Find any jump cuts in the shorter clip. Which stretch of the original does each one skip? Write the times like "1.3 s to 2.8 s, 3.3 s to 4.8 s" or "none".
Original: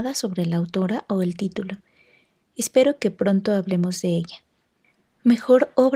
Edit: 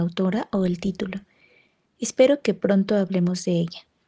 none